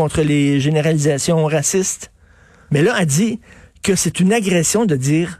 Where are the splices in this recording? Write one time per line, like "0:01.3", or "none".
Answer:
0:02.7